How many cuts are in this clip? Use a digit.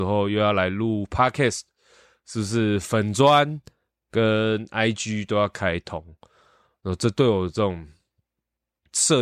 0